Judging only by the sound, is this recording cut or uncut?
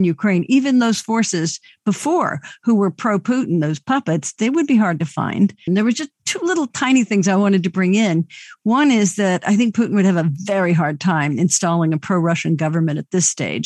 cut